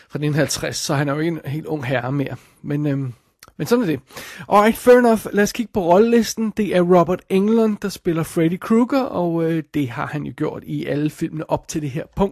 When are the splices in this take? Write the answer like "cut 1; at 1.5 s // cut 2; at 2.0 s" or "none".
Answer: none